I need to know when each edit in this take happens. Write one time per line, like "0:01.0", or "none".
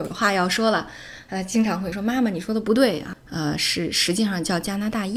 0:01.9
0:03.1